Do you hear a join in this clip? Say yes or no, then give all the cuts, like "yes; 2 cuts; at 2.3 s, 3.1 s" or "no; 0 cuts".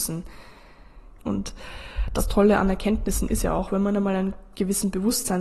yes; 1 cut; at 1.2 s